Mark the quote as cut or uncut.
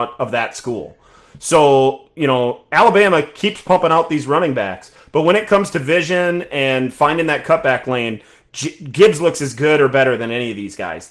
uncut